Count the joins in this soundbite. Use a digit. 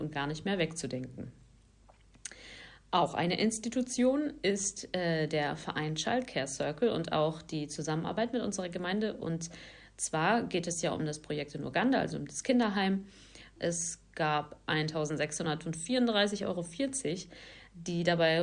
1